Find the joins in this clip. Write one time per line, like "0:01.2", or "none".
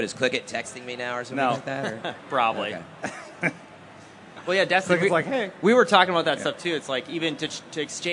none